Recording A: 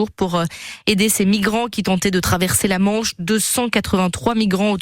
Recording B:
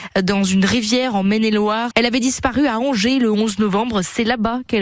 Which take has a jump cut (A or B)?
B